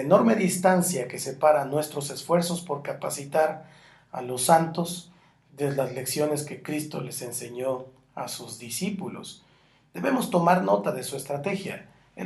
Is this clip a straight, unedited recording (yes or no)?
yes